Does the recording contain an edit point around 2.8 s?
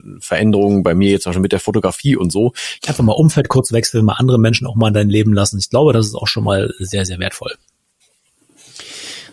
yes; 1 cut; at 2.8 s

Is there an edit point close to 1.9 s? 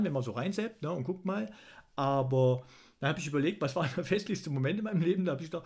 no; 0 cuts

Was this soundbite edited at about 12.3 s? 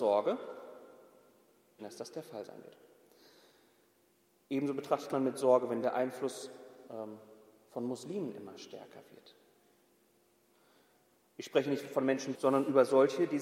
yes; 2 cuts; at 1.8 s, 12.3 s

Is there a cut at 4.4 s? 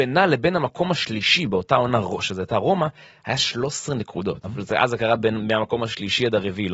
yes; 1 cut; at 4.4 s

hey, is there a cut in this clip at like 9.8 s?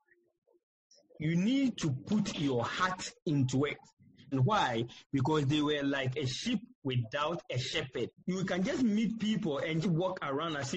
yes; 3 cuts; at 4.3 s, 8.2 s, 9.8 s

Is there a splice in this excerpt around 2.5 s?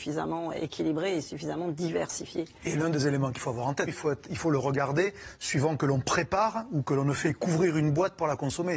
no; 1 cut; at 3.9 s

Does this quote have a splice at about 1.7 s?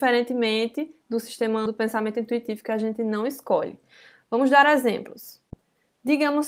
yes; 1 cut; at 1.7 s

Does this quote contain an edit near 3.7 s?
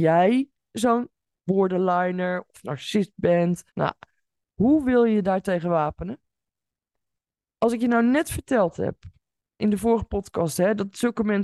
yes; 1 cut; at 3.7 s

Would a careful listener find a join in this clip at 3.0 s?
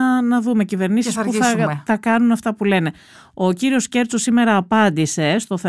no; 0 cuts

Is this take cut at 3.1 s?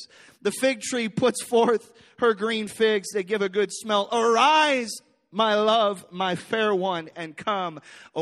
yes; 1 cut; at 3.1 s

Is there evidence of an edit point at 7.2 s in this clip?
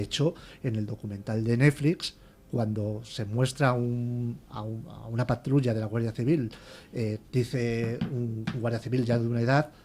yes; 1 cut; at 7.2 s

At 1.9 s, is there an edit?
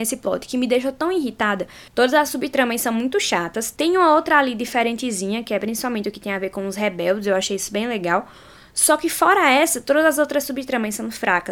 yes; 1 cut; at 1.9 s

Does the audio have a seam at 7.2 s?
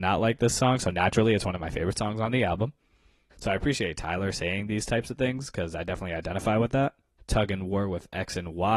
yes; 2 cuts; at 3.3 s, 7.2 s

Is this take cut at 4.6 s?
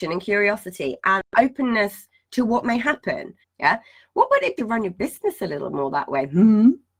yes; 2 cuts; at 3.4 s, 4.6 s

